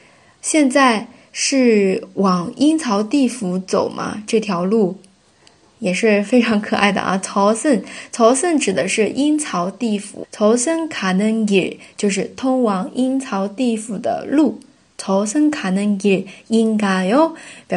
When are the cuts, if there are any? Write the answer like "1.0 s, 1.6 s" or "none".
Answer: 10.2 s